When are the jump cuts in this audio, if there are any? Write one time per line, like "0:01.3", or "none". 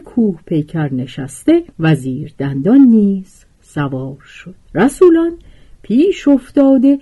0:01.7
0:04.6